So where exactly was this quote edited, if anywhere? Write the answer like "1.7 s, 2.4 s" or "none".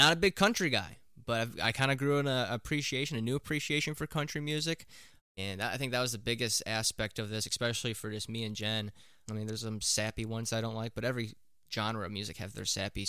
5.2 s, 9.3 s